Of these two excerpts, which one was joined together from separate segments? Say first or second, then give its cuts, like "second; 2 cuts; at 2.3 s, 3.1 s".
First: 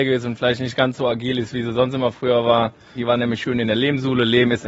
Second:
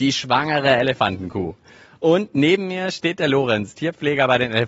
first; 1 cut; at 3.0 s